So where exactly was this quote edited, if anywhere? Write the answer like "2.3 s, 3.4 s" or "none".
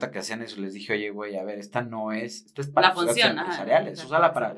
none